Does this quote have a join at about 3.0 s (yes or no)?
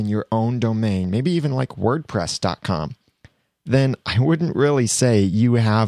no